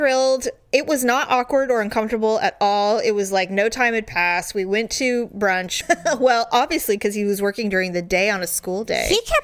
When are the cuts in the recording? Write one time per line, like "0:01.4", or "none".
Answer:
0:05.8

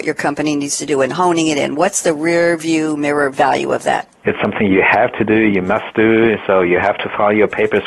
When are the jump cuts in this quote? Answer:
0:04.2

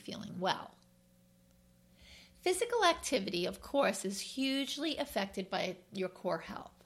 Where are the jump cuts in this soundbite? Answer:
none

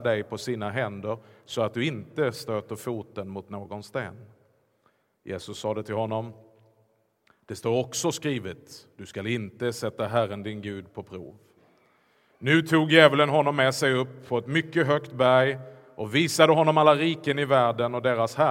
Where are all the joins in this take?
none

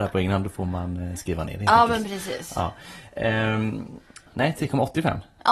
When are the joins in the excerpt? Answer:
0:04.3

